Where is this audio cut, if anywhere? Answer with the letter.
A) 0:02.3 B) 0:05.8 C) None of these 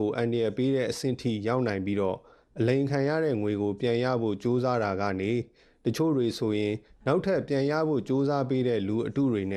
C